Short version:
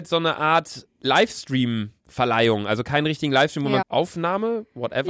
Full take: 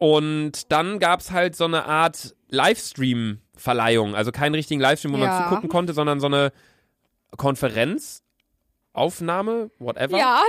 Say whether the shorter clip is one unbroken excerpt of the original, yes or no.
no